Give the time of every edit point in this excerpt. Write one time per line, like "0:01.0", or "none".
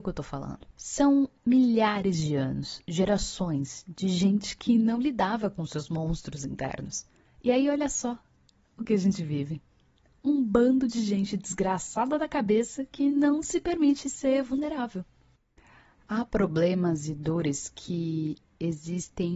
none